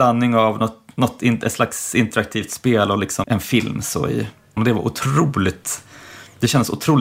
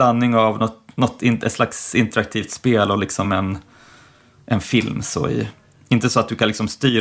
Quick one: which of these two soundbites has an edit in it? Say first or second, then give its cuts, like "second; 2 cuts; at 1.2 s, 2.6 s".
first; 2 cuts; at 3.2 s, 4.6 s